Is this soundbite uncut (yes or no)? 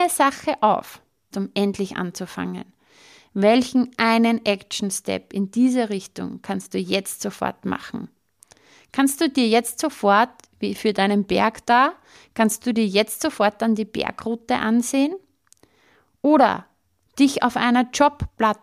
no